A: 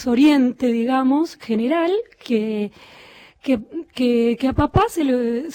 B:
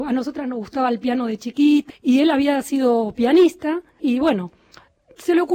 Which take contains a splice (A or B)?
B